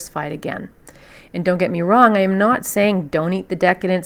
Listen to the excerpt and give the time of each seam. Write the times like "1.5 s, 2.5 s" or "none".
none